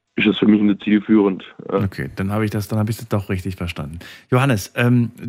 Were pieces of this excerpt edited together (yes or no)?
no